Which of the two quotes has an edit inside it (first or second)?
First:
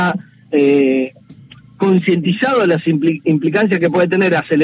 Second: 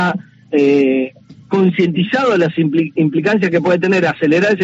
second